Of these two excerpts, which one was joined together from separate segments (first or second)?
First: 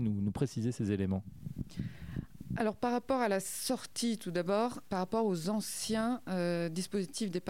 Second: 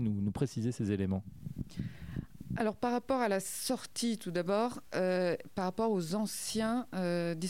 first